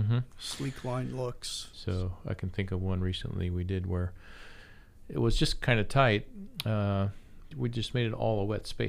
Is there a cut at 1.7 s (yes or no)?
yes